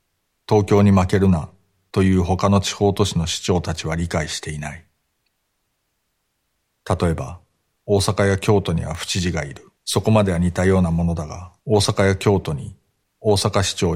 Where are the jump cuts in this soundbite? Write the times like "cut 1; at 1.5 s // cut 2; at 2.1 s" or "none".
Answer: cut 1; at 7.8 s // cut 2; at 9.8 s // cut 3; at 11.6 s